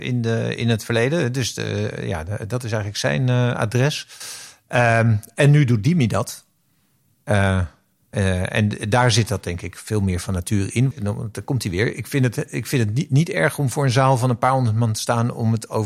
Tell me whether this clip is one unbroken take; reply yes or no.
no